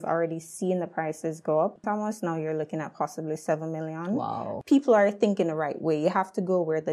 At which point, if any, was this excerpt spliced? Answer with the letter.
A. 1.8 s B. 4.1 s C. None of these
A